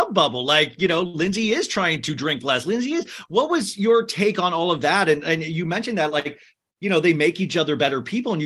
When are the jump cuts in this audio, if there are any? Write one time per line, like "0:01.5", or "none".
none